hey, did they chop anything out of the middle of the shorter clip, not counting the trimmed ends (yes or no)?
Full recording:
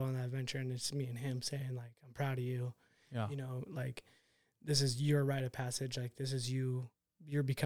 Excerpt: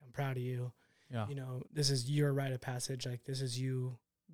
yes